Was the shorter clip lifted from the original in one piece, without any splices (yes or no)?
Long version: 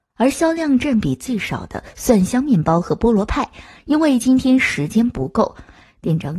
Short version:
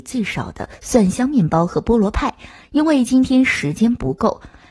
yes